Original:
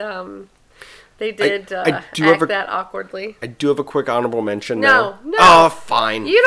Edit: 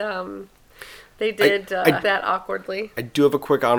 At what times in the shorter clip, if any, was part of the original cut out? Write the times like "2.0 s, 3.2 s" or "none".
2.0 s

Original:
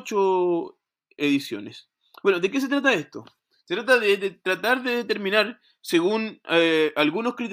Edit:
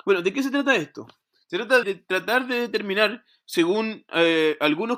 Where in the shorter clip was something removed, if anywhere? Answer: 1.8 s

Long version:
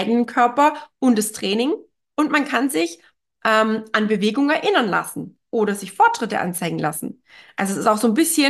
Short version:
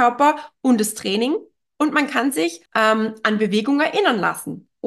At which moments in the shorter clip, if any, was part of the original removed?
2.7 s

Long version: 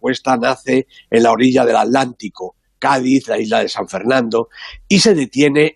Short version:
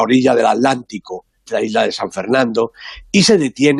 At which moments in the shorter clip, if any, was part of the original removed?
1.5 s

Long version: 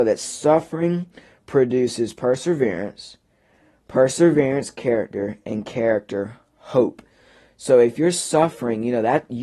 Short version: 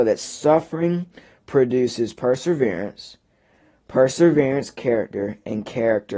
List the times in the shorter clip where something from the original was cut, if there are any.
none

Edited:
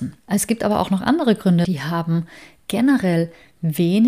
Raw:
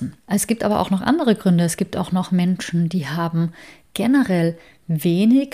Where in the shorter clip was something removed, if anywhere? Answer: 1.6 s

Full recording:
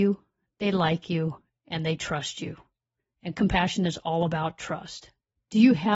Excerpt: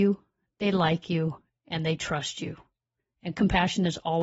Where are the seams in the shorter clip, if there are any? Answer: none

